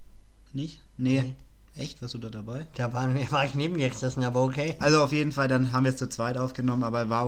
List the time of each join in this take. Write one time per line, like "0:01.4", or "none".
0:04.8